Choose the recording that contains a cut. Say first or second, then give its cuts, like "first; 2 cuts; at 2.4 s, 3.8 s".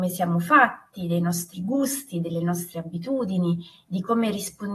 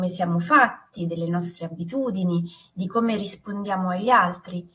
second; 1 cut; at 1.0 s